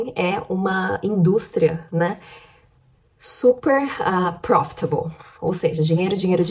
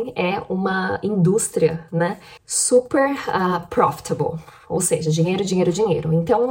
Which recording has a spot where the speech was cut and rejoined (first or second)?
second